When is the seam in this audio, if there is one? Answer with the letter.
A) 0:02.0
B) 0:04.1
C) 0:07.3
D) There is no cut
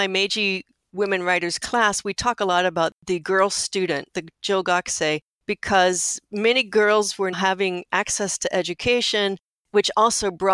C